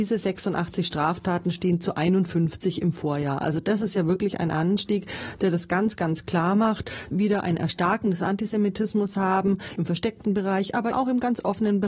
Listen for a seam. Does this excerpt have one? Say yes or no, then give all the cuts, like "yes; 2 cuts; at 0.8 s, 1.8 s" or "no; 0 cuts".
yes; 3 cuts; at 7.1 s, 9.8 s, 10.9 s